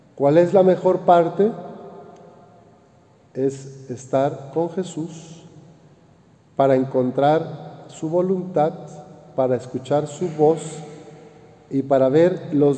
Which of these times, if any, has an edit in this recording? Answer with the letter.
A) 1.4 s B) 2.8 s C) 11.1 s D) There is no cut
D